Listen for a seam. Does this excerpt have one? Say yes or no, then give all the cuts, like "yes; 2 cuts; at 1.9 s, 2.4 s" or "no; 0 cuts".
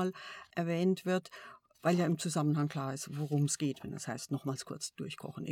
no; 0 cuts